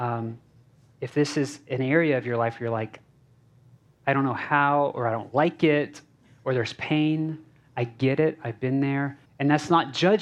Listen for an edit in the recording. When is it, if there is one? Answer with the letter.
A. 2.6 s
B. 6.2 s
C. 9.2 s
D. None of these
C